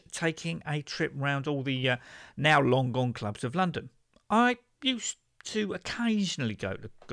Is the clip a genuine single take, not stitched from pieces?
yes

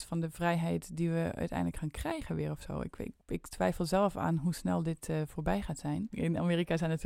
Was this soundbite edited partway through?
yes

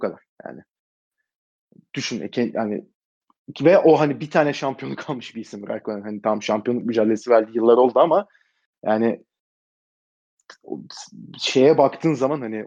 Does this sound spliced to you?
no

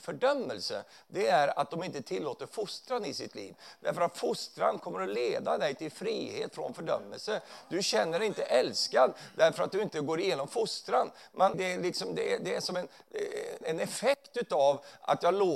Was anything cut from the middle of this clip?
yes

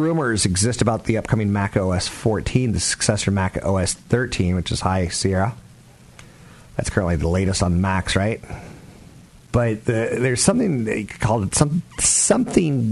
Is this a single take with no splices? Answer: yes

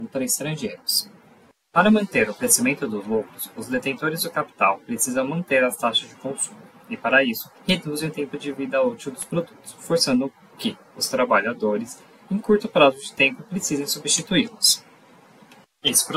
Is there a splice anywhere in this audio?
yes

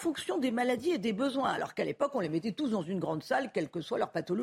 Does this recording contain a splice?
no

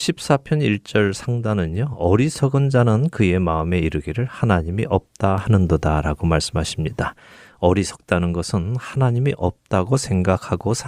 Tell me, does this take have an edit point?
no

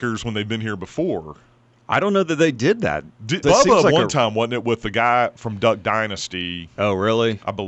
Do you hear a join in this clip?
yes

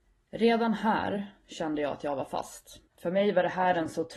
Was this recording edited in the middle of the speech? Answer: yes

